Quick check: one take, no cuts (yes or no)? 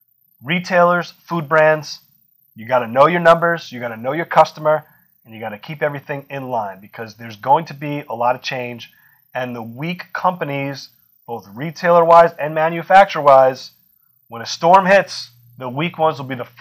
yes